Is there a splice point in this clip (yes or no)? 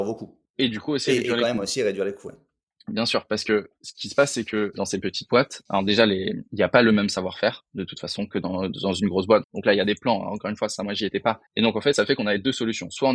yes